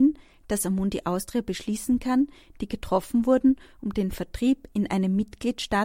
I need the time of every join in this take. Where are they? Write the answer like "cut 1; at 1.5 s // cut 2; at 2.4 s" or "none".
cut 1; at 2.5 s